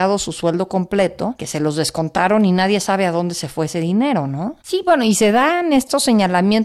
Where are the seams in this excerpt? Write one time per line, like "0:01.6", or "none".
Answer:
0:04.6